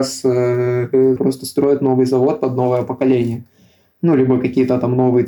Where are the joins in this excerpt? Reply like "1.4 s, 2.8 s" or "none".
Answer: 1.2 s